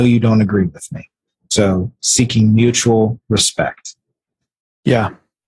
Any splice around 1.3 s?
yes; 1 cut; at 1.3 s

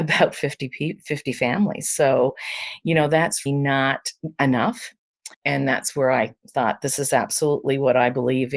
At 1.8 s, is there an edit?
no; 2 cuts; at 3.5 s, 5.3 s

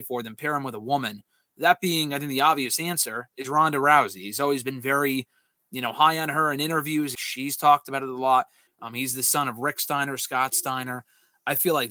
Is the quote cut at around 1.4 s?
no; 2 cuts; at 7.1 s, 8.7 s

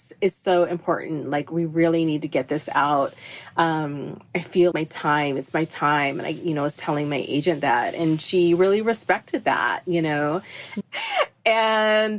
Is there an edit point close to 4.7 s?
yes; 2 cuts; at 4.7 s, 10.8 s

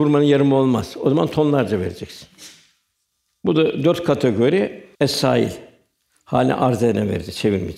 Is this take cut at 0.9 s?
no; 1 cut; at 4.9 s

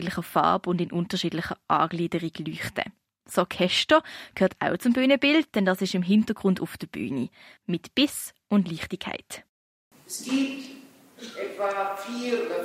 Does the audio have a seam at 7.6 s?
yes; 1 cut; at 7.6 s

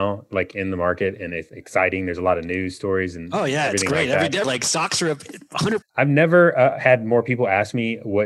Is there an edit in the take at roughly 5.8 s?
yes; 2 cuts; at 4.4 s, 5.8 s

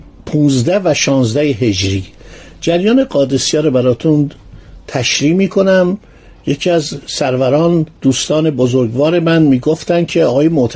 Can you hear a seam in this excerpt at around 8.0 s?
yes; 1 cut; at 8.0 s

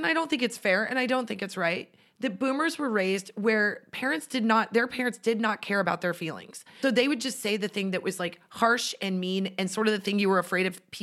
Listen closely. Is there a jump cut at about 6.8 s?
yes; 1 cut; at 6.8 s

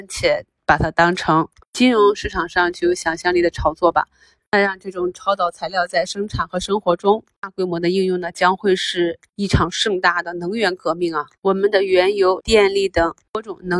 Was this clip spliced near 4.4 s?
yes; 2 cuts; at 4.4 s, 12.4 s

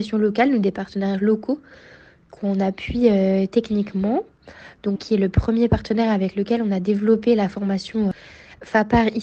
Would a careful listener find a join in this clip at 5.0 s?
yes; 1 cut; at 5.0 s

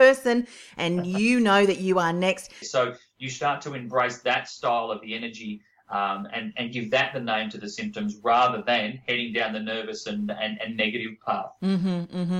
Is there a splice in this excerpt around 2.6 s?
yes; 1 cut; at 2.6 s

